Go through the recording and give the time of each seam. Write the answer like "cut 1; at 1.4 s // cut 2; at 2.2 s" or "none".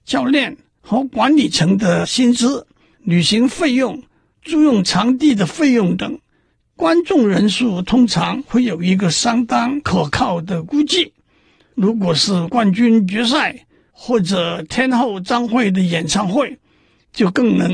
none